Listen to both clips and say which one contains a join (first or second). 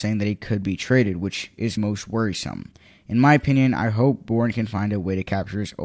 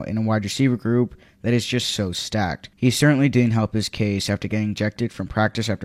first